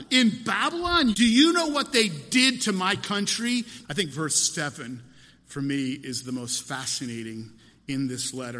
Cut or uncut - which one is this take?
cut